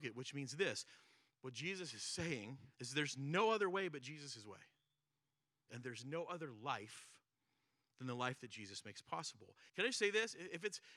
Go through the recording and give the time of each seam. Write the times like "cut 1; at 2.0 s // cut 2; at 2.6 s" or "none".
cut 1; at 2.7 s // cut 2; at 5.7 s // cut 3; at 9.7 s